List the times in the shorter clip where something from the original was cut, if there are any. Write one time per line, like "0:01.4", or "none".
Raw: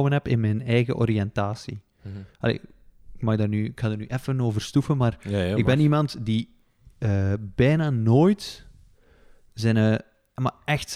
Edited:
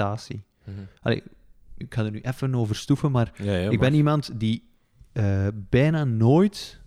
0:01.8